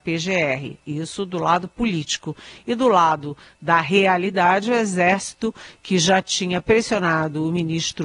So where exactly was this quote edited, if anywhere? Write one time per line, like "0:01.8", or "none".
none